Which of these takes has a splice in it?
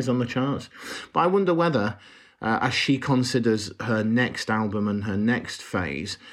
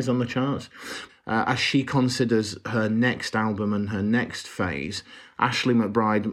second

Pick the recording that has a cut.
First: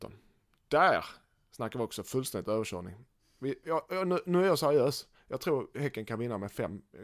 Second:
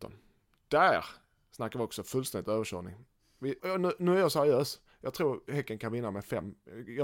second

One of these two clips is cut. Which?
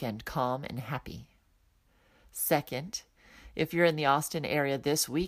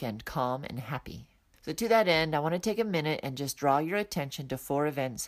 second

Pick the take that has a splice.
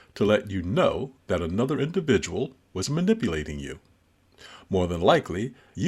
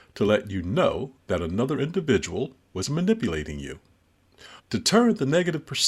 second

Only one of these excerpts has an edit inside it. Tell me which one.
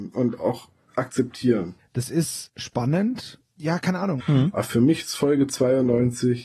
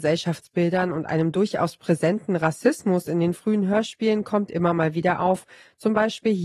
first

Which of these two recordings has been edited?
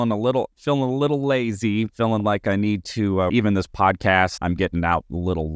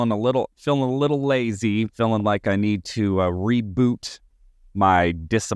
first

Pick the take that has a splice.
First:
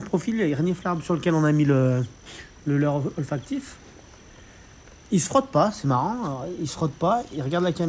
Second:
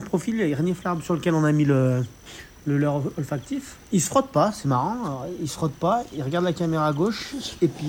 second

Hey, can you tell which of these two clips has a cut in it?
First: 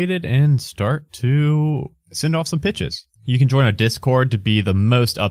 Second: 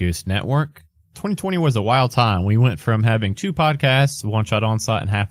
first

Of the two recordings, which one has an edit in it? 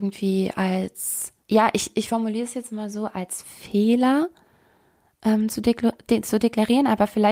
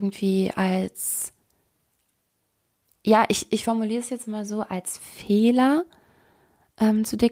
first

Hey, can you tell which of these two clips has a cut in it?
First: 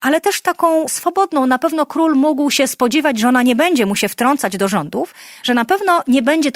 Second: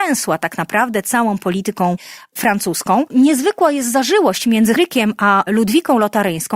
second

